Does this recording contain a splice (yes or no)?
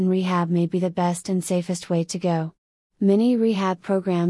no